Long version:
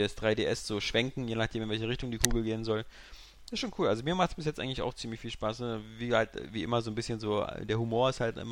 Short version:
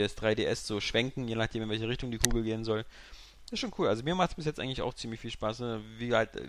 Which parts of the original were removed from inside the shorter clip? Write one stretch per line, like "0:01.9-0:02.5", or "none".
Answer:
none